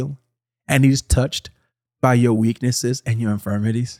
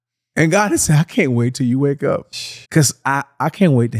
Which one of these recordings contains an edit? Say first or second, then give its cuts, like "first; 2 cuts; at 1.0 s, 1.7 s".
second; 1 cut; at 2.6 s